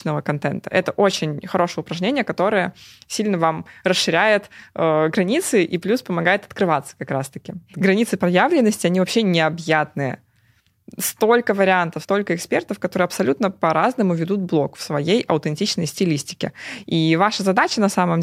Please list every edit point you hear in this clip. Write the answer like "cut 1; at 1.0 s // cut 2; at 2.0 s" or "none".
cut 1; at 7.7 s // cut 2; at 12.0 s